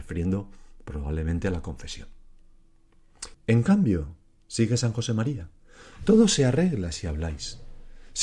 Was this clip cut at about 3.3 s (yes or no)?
yes